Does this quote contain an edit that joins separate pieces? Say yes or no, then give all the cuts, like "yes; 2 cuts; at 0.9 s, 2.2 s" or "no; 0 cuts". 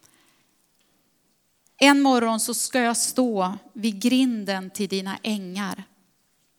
no; 0 cuts